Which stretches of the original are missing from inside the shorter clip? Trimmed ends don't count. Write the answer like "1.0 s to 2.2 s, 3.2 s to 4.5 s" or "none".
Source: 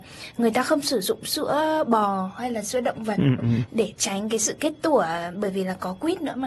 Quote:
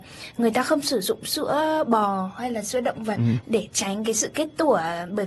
3.2 s to 3.4 s